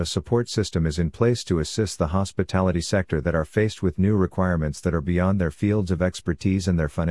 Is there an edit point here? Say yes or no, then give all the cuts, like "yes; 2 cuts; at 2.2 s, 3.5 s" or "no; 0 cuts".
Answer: no; 0 cuts